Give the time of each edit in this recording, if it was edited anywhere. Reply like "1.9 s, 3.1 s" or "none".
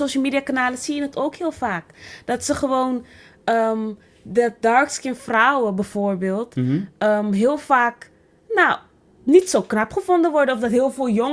none